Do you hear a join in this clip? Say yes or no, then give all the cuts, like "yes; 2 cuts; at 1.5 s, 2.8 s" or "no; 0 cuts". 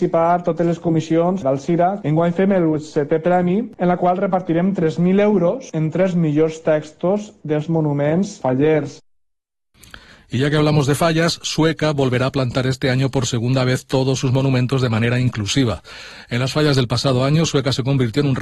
no; 0 cuts